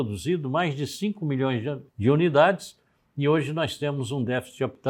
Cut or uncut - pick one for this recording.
cut